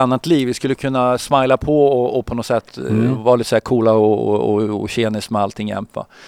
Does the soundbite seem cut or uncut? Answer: uncut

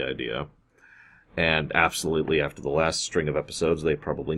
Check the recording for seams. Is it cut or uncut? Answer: uncut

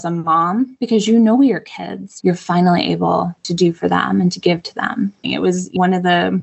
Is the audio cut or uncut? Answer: cut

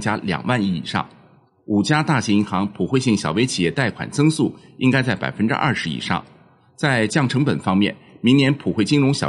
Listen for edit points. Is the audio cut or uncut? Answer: uncut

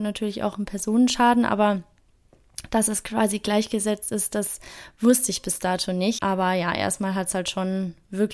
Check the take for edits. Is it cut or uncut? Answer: cut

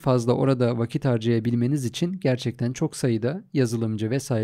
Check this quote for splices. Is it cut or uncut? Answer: uncut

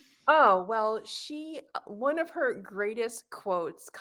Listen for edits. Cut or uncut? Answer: cut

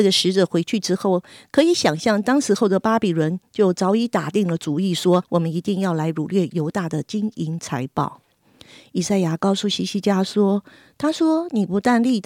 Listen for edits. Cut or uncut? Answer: cut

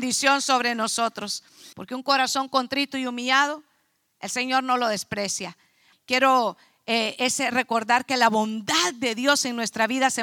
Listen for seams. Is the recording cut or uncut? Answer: cut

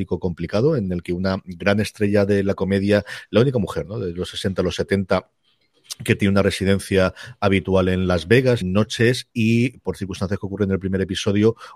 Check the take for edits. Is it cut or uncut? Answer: cut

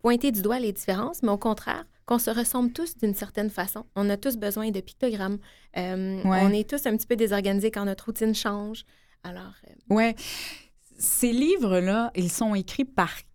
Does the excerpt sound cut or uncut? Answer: uncut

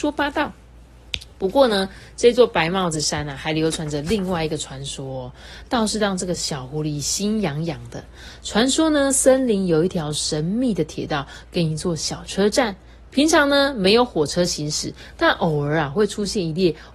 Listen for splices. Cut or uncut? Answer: uncut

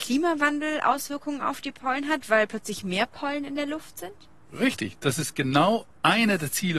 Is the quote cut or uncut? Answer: uncut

